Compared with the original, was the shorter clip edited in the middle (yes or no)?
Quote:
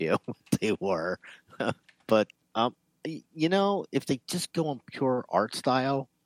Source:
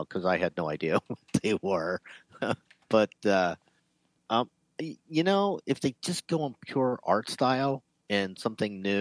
yes